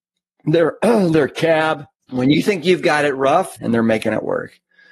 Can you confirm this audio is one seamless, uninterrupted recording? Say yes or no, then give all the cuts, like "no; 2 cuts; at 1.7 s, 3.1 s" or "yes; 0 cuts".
no; 2 cuts; at 2.0 s, 3.6 s